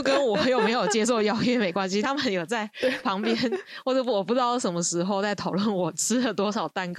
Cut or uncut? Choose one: uncut